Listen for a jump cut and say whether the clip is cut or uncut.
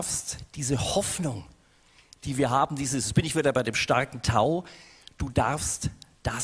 uncut